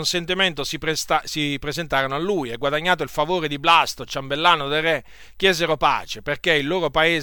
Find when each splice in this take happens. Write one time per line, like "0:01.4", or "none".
none

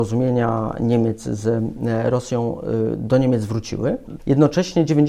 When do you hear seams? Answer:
0:04.2

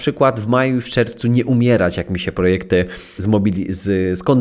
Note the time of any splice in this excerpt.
0:03.2

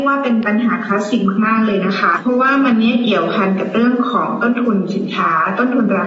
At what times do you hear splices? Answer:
0:02.1

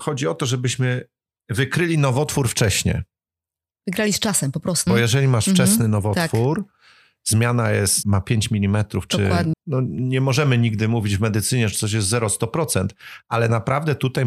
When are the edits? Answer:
0:04.9
0:08.0
0:09.5

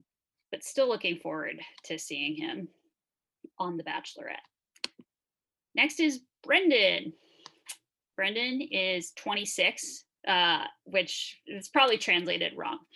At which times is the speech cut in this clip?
0:10.2

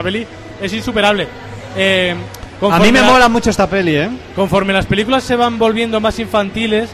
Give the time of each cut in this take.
none

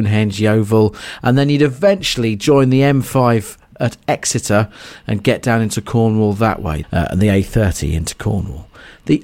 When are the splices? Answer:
0:06.8

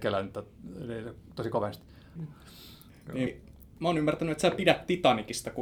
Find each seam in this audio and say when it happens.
0:02.2
0:03.3

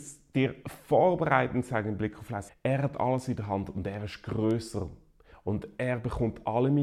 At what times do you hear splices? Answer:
0:02.5

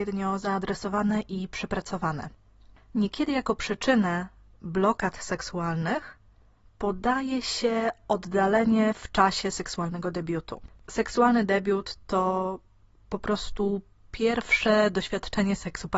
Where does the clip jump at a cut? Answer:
none

